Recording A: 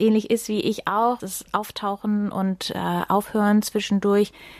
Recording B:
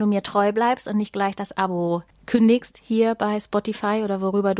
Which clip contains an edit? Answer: A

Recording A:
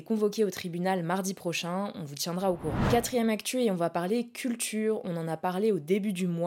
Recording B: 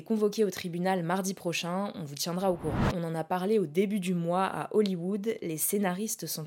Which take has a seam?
B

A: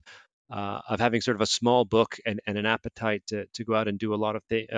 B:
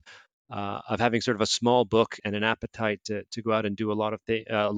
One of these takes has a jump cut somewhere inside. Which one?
B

